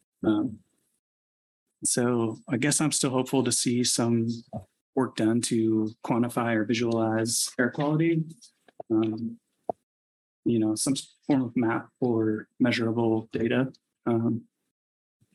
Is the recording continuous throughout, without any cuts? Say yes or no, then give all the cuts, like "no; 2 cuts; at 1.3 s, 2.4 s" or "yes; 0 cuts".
yes; 0 cuts